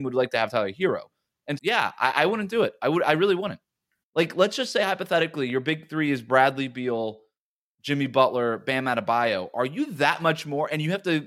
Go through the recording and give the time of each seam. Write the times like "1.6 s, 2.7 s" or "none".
1.6 s, 4.0 s